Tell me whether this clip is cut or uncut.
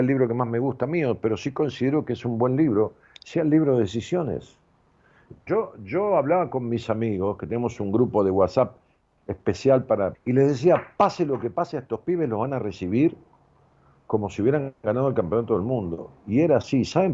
cut